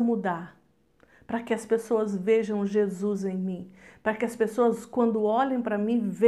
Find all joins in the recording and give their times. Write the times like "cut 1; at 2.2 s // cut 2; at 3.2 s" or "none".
none

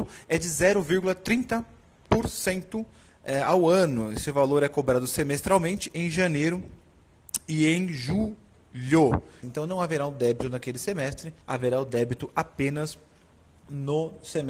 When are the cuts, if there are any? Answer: cut 1; at 9.4 s // cut 2; at 11.4 s

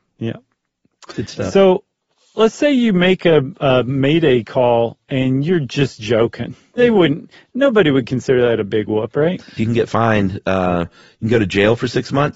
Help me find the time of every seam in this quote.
cut 1; at 6.8 s // cut 2; at 9.6 s

